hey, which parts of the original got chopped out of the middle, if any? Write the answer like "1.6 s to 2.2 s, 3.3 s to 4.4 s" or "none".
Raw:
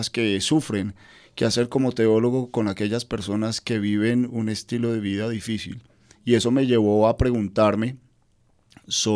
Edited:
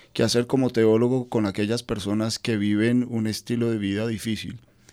none